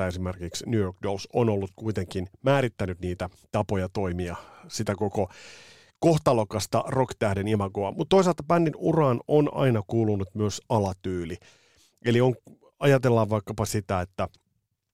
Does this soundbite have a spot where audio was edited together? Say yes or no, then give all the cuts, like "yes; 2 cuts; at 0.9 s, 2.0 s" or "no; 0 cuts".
yes; 1 cut; at 7.9 s